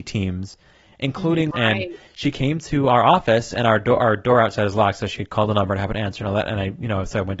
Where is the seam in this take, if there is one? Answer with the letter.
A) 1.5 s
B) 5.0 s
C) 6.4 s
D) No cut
A